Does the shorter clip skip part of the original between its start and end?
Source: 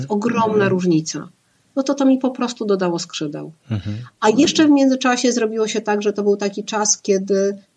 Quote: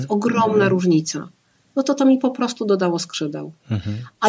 no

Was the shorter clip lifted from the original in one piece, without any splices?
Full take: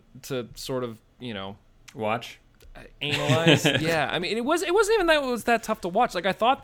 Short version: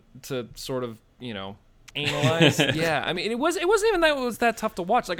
no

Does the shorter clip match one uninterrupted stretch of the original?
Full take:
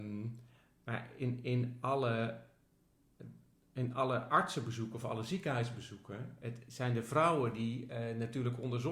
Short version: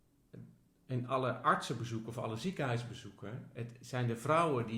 yes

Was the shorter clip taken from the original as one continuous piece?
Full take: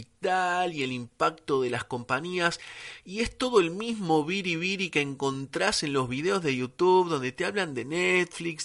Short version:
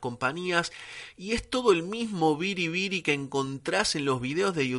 yes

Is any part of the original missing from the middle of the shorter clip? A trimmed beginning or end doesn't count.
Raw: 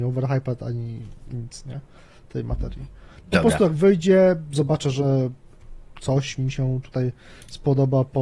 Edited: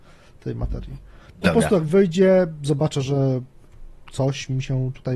no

